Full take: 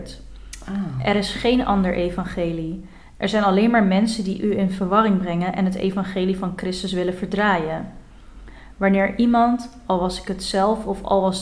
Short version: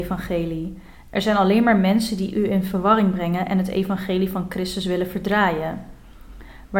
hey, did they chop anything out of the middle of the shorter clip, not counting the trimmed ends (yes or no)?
no